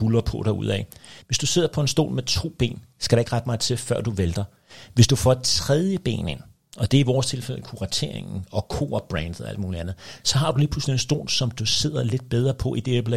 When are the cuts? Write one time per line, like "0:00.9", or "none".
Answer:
0:01.2